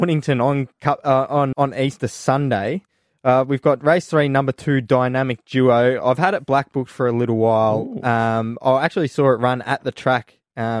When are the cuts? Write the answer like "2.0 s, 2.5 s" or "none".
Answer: 1.5 s